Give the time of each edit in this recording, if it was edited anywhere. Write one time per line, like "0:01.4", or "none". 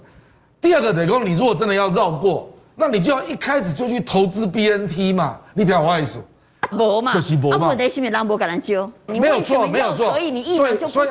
0:06.7
0:09.1